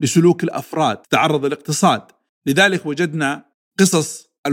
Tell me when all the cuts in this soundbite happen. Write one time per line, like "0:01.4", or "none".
0:01.0